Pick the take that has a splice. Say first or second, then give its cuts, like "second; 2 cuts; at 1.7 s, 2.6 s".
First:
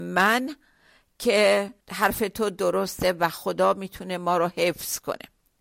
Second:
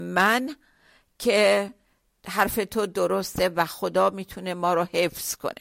first; 1 cut; at 1.8 s